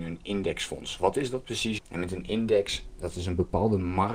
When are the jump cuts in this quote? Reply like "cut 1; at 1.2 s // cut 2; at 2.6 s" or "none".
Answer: cut 1; at 1.8 s